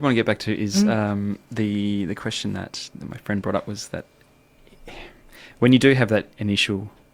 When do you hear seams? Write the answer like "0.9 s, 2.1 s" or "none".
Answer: none